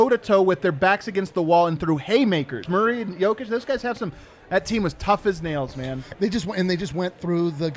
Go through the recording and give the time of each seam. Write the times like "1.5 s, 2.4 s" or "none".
2.7 s